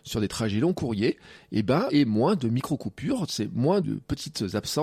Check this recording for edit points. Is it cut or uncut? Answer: cut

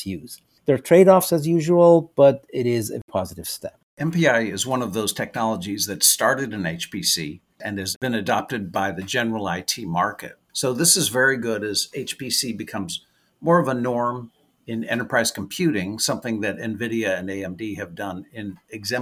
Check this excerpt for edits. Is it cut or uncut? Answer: cut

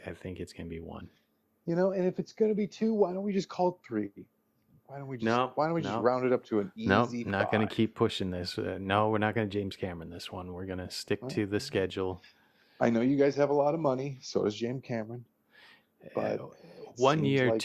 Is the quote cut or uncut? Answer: uncut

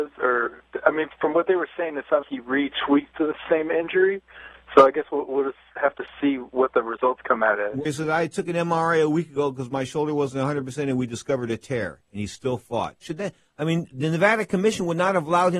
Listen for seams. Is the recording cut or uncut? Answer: cut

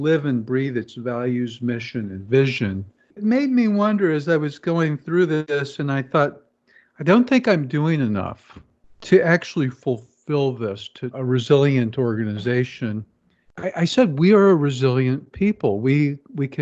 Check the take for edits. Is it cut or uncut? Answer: cut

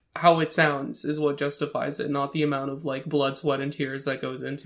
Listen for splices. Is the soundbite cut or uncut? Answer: uncut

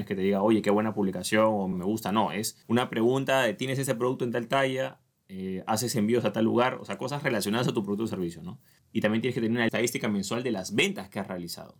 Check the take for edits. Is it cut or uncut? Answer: uncut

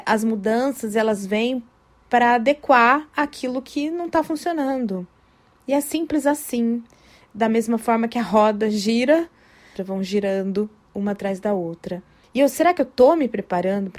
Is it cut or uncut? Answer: cut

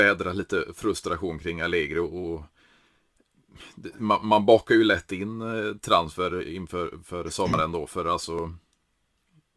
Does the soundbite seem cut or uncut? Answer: uncut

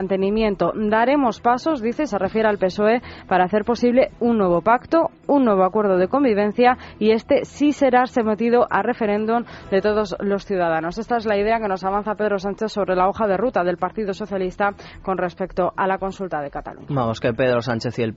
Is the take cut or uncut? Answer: uncut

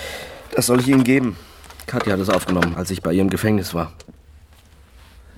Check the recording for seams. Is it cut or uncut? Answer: cut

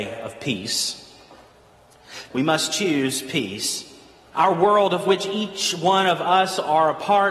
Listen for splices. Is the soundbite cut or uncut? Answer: cut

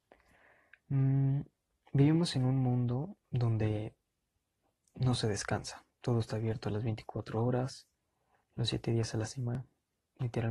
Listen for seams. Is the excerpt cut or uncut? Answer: uncut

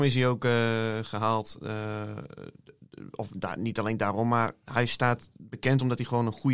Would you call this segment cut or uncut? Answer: uncut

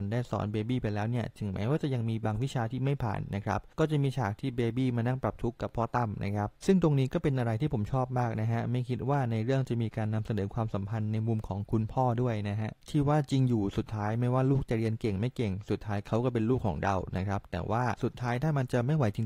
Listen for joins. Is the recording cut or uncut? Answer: uncut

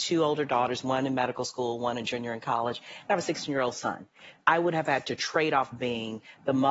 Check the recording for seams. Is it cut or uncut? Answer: cut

